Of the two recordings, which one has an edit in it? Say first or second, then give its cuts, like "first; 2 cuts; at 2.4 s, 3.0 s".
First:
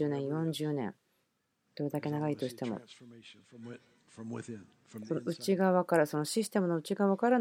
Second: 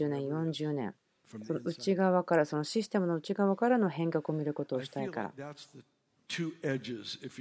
second; 1 cut; at 1.2 s